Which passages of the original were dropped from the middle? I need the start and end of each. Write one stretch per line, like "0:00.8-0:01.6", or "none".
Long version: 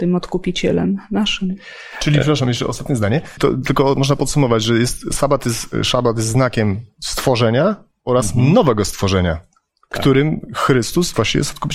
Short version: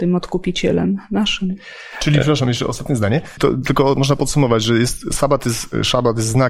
none

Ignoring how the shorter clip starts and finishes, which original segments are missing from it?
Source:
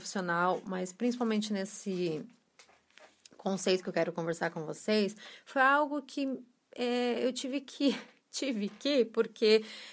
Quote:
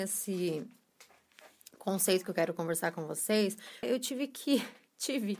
0:05.4-0:07.2

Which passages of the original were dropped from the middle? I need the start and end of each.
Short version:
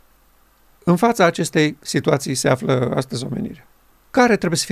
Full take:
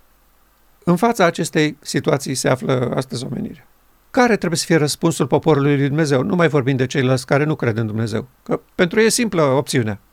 none

